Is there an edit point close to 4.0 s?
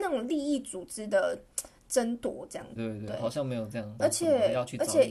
yes; 2 cuts; at 2.8 s, 4.0 s

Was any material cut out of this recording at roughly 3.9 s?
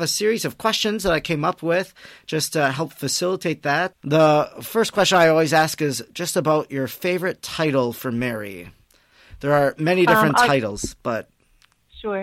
yes; 1 cut; at 3.9 s

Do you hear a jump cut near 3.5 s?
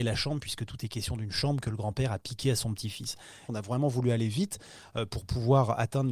yes; 1 cut; at 3.5 s

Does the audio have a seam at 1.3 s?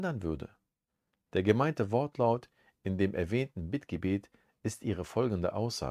yes; 1 cut; at 1.3 s

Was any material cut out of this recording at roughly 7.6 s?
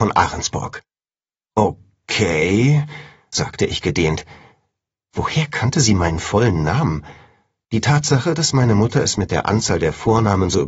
yes; 1 cut; at 7.6 s

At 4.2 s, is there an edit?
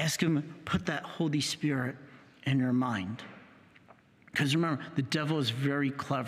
no; 0 cuts

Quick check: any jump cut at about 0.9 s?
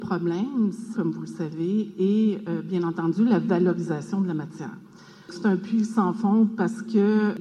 yes; 1 cut; at 0.9 s

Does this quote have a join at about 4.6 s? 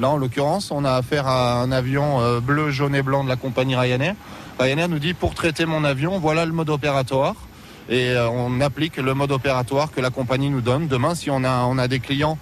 no; 0 cuts

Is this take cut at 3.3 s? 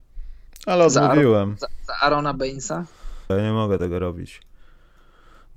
yes; 1 cut; at 3.3 s

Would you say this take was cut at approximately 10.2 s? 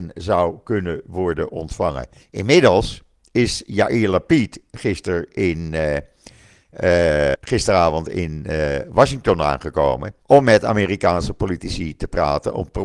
yes; 3 cuts; at 2.2 s, 7.3 s, 10.2 s

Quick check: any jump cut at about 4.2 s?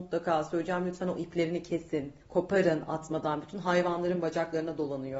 no; 1 cut; at 2.2 s

